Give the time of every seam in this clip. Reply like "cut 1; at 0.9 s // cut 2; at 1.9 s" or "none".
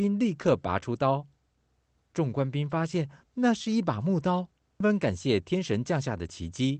cut 1; at 4.8 s